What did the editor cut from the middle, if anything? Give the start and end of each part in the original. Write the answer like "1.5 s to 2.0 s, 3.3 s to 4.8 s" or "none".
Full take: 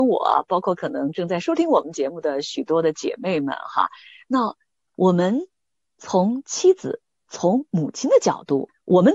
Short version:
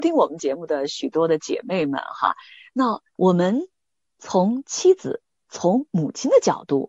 4.6 s to 4.9 s